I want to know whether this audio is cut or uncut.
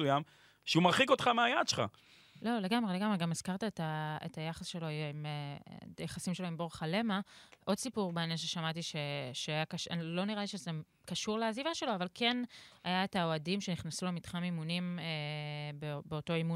uncut